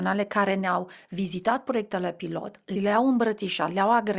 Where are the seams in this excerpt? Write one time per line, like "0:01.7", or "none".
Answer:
0:02.7